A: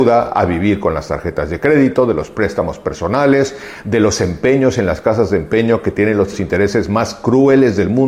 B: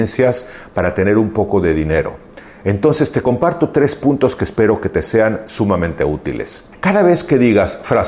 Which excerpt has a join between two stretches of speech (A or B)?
B